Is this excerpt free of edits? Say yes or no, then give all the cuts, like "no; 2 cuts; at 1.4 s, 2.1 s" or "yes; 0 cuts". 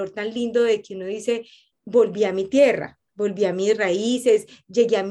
no; 2 cuts; at 1.7 s, 3.1 s